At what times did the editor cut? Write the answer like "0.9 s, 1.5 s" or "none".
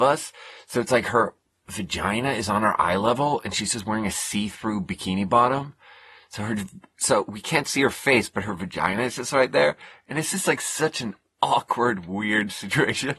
none